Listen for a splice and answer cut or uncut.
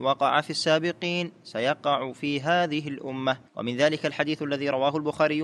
cut